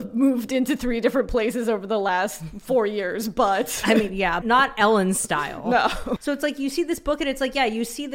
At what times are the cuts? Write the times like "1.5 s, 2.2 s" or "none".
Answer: 4.4 s, 6.2 s